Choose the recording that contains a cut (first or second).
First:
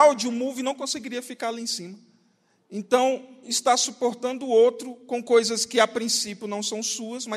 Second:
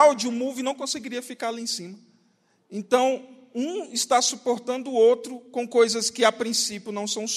first